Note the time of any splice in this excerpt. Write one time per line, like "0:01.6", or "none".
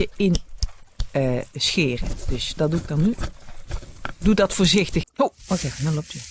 0:02.6
0:05.0